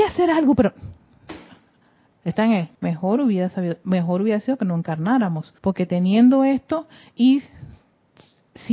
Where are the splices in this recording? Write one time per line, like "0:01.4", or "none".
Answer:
0:02.7
0:05.6